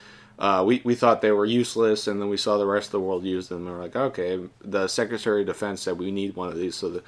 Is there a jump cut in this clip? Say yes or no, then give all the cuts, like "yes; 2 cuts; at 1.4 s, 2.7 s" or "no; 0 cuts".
no; 0 cuts